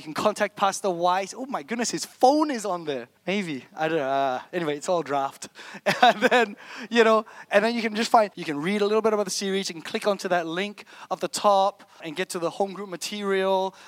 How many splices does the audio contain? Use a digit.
3